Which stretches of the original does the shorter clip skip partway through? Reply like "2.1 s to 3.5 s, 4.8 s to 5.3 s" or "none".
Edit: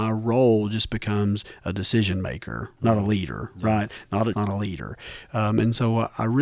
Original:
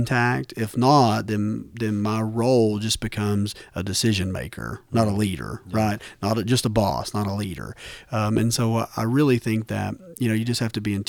6.4 s to 7.1 s